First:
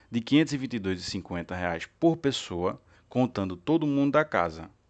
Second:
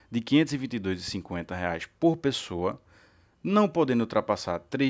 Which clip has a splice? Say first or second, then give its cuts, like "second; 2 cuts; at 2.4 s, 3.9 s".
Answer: first; 1 cut; at 2.9 s